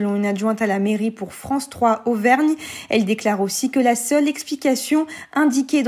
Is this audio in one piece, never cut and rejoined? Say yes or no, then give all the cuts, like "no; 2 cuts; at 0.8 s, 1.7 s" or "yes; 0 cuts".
yes; 0 cuts